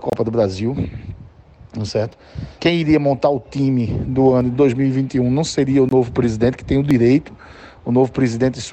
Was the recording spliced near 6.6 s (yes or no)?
no